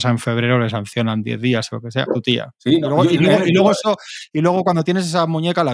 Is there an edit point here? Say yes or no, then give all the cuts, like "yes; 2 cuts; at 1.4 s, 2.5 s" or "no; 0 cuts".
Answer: yes; 1 cut; at 2.1 s